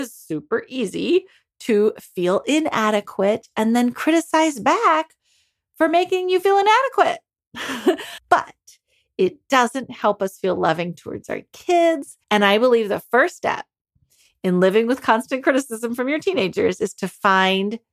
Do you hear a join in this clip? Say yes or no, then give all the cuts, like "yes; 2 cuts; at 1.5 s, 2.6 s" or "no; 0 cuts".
yes; 2 cuts; at 8.2 s, 12.2 s